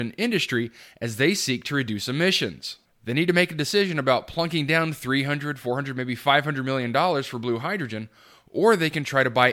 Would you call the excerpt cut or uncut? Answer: cut